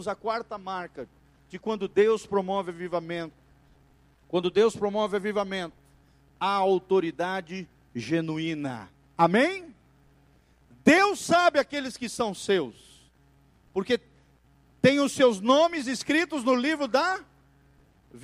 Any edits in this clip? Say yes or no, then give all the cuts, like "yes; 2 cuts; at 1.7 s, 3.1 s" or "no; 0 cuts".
no; 0 cuts